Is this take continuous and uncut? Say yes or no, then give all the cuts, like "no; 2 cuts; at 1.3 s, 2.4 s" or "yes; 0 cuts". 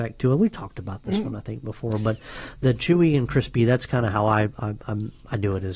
yes; 0 cuts